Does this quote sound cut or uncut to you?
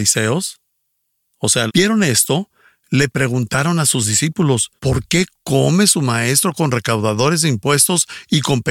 cut